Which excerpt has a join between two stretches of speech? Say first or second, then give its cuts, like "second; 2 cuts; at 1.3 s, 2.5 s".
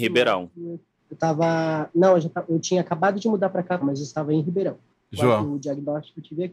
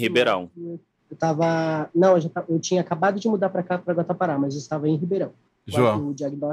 first; 1 cut; at 3.8 s